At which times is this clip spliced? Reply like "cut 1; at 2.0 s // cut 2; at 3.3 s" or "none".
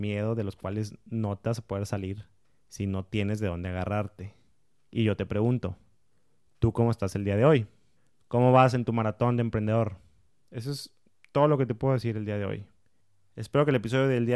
cut 1; at 10.4 s